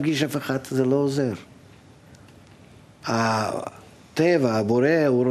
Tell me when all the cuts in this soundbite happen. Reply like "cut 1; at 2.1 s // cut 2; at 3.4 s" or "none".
cut 1; at 3.0 s